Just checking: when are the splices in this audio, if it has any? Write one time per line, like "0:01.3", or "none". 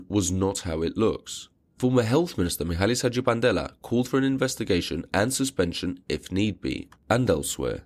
0:07.0